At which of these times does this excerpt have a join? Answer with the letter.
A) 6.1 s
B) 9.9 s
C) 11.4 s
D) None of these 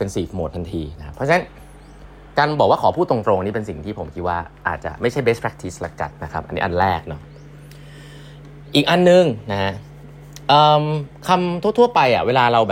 A